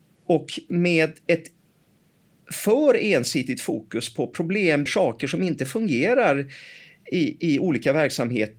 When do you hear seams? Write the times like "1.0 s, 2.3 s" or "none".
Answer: 4.9 s